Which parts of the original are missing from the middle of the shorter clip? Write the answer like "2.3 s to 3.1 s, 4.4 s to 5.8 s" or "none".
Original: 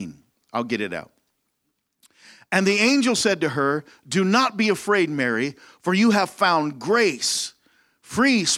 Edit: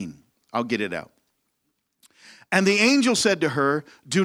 none

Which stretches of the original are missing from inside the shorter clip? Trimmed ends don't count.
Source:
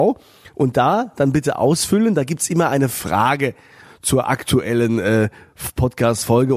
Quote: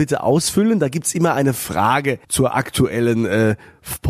3.6 s to 4.0 s

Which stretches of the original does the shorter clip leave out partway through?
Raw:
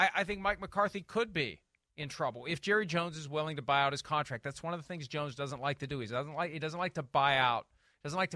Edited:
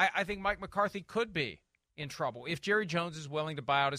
none

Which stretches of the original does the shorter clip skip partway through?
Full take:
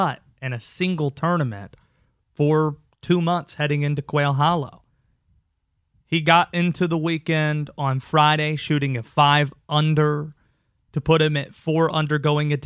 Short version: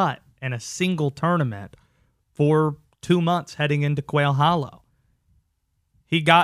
none

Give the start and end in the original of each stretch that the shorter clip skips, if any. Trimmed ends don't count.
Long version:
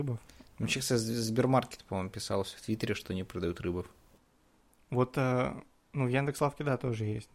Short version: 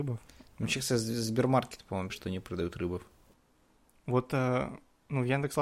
2.1 s to 2.9 s

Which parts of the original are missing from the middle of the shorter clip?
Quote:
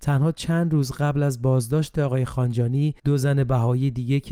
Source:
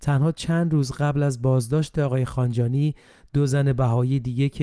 3.0 s to 3.3 s

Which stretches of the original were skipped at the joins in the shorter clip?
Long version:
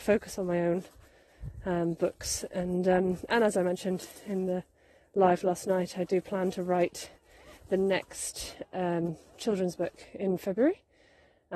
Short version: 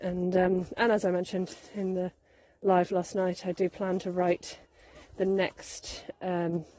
none

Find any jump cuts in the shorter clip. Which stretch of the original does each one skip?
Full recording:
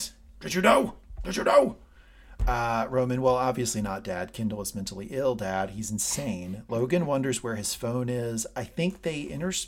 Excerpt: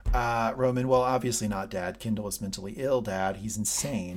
none

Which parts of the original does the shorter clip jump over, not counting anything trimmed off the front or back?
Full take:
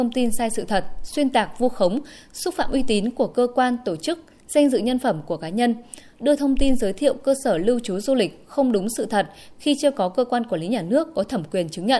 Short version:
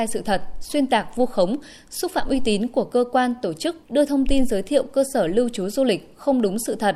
4.3 s to 6.1 s

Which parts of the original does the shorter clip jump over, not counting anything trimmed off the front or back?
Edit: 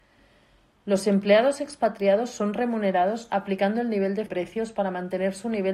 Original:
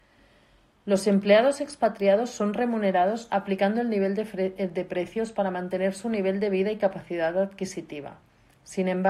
4.3 s to 4.9 s

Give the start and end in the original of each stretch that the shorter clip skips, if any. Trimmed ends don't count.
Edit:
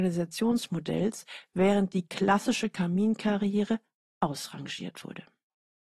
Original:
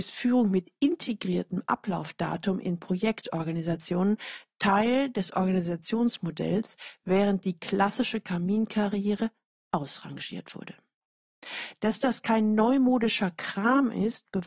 none

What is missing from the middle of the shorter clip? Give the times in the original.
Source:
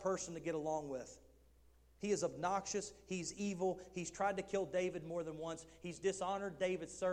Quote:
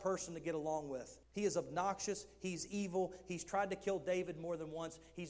1.2 s to 1.9 s

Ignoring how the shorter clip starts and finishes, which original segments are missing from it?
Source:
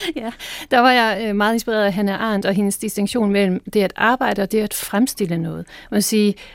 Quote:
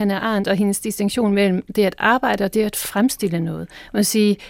none

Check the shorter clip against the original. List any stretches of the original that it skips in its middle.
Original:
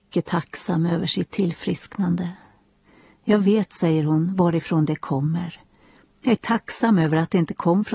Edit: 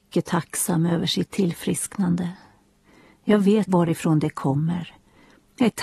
3.7 s to 4.3 s

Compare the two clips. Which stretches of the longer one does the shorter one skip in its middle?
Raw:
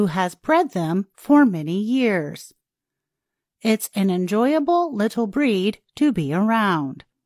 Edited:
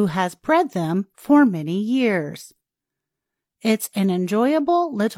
none

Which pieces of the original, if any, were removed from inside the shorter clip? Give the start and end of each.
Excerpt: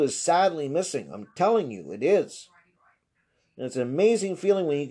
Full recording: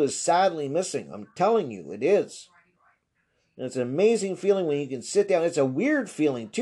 none

